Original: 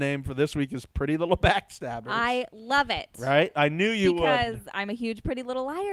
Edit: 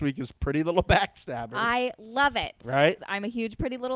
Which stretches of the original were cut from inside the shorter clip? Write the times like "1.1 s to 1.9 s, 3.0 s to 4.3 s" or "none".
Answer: 3.5 s to 4.6 s